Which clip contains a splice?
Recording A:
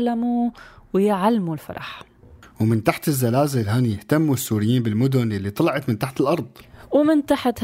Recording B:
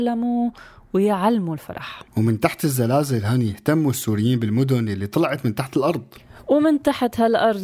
B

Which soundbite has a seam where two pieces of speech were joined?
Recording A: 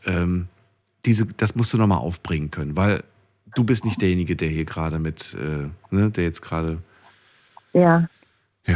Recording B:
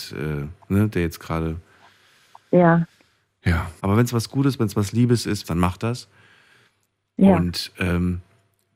B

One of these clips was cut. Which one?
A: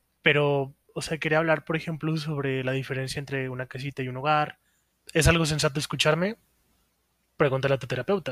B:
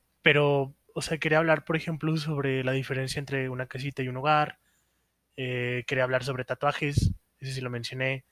A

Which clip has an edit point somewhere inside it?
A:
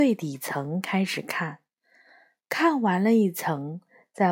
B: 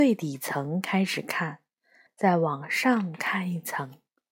B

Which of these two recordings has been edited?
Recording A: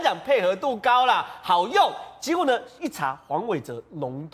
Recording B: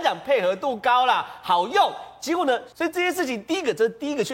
B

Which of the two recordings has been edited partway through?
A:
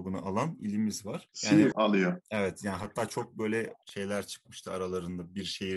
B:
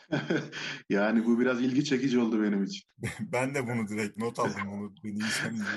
A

